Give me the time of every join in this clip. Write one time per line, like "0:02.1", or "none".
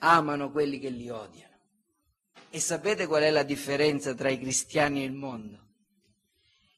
0:02.4